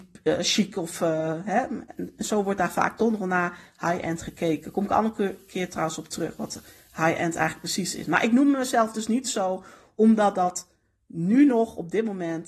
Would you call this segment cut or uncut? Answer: uncut